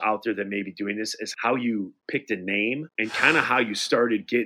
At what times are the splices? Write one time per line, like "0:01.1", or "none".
0:02.9